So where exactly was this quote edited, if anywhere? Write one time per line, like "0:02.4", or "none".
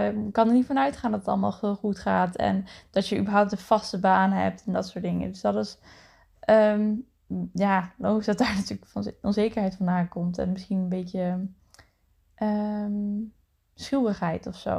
none